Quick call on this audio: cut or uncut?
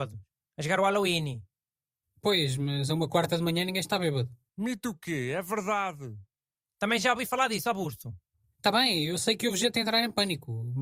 cut